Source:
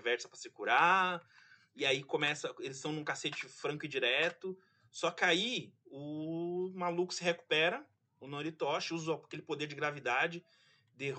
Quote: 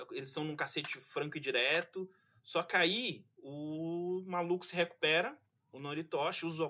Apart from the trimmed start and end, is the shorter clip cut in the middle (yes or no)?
no